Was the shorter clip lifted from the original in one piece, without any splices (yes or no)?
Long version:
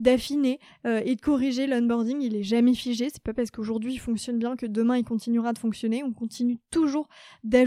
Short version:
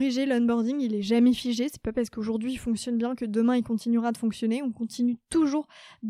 yes